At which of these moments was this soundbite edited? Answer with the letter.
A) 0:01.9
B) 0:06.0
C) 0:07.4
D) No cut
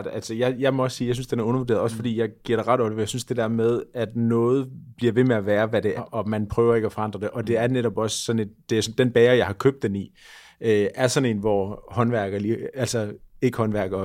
B